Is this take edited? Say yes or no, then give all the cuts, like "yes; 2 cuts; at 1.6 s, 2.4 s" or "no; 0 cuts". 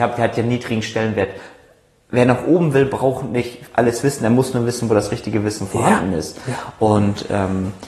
no; 0 cuts